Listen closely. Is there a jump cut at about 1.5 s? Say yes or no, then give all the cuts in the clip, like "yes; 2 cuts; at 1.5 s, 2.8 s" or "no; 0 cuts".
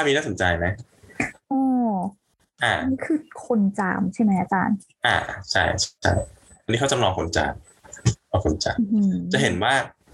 no; 0 cuts